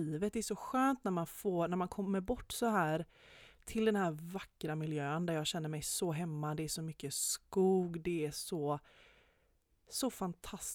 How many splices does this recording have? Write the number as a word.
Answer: zero